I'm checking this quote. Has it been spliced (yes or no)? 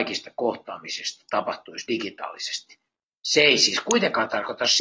no